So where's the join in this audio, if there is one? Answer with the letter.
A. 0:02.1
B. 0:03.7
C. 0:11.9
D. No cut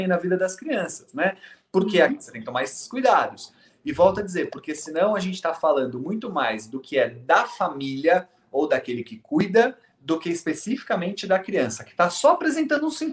A